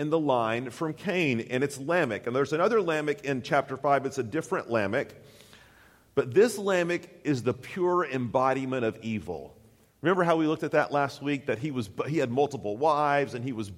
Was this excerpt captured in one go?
no; 1 cut; at 7.2 s

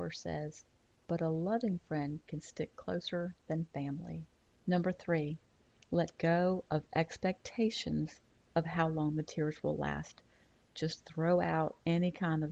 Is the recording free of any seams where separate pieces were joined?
no; 1 cut; at 0.9 s

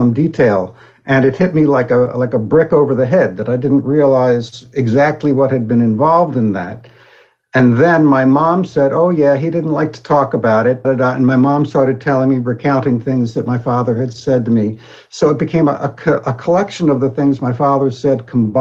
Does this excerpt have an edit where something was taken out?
yes; 1 cut; at 10.8 s

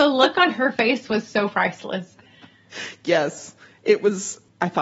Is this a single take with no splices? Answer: yes; 0 cuts

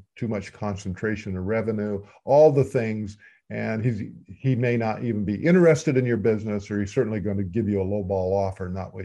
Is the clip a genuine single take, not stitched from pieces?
yes; 0 cuts

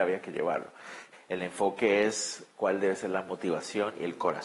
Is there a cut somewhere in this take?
yes; 1 cut; at 1.1 s

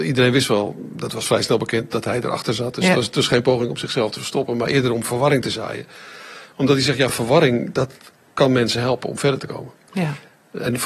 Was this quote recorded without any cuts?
yes; 0 cuts

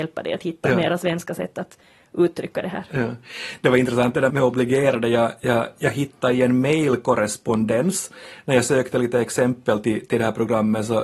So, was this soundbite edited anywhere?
yes; 1 cut; at 4.3 s

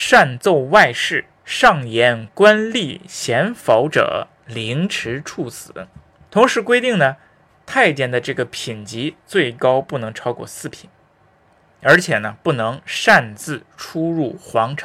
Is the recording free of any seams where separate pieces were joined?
no; 1 cut; at 6.3 s

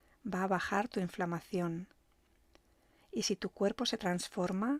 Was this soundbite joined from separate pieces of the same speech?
no; 0 cuts

